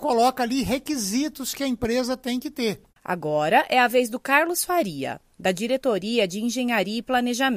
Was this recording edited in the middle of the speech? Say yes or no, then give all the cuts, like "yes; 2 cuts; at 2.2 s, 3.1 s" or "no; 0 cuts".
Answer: yes; 1 cut; at 2.9 s